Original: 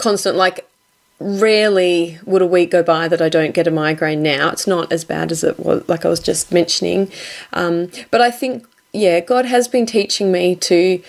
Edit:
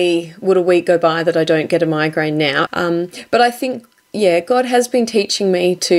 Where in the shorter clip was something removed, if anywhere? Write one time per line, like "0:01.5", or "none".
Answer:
0:02.7